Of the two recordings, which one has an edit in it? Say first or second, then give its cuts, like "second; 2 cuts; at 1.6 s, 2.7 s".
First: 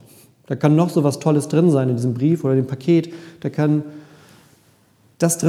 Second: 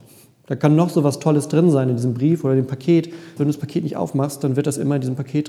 second; 1 cut; at 3.4 s